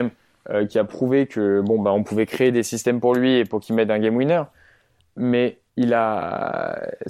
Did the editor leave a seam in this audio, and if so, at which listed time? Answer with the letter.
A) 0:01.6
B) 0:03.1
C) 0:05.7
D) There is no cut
C